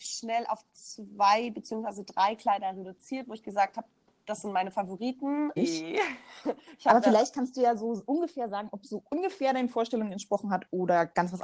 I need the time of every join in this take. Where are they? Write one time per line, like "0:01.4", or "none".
0:05.6